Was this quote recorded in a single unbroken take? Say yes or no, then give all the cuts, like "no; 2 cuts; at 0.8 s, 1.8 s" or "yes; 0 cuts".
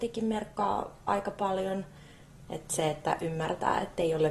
no; 1 cut; at 2.5 s